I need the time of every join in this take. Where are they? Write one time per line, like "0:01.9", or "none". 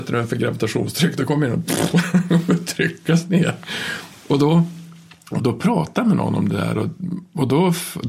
0:05.4